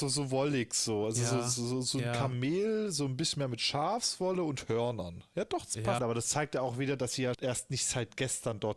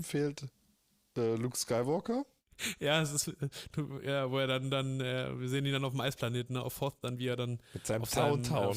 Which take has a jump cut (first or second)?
first